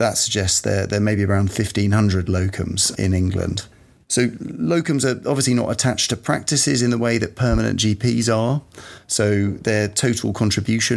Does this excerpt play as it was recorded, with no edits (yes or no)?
yes